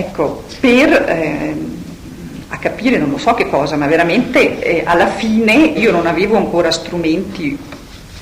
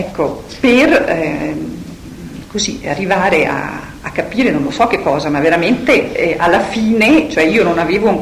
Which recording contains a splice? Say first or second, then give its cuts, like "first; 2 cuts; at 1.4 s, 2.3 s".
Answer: first; 2 cuts; at 2.5 s, 5.7 s